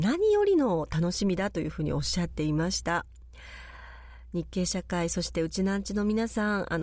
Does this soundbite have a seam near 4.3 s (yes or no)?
no